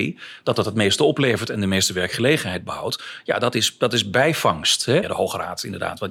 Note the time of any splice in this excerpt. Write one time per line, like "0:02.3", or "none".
0:05.0